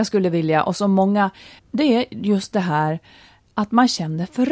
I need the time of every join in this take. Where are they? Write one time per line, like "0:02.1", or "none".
0:01.6